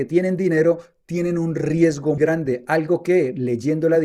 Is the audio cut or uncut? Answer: cut